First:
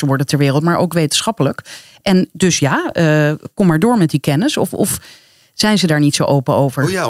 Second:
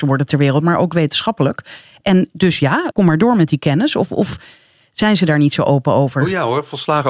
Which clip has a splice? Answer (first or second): second